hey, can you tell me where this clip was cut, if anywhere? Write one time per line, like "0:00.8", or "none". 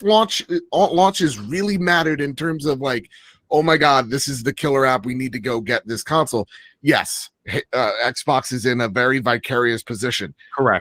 none